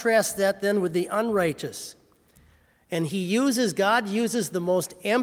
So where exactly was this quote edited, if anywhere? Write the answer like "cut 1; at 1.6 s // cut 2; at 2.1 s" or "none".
none